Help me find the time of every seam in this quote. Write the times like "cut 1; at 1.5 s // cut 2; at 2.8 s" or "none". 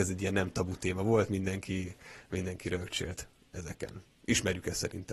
none